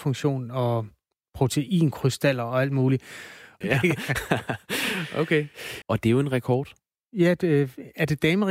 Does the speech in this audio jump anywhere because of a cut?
yes; 2 cuts; at 3.6 s, 5.8 s

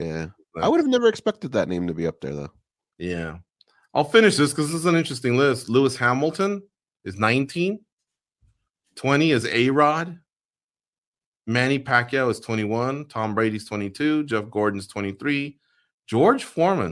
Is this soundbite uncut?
yes; 0 cuts

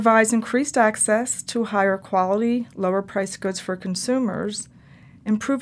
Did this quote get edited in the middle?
no; 0 cuts

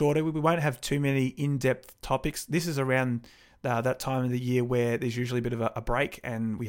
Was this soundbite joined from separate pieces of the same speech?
no; 0 cuts

